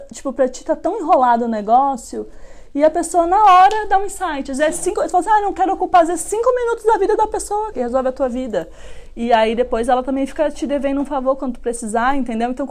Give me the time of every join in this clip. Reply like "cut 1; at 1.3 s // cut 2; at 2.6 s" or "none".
cut 1; at 7.7 s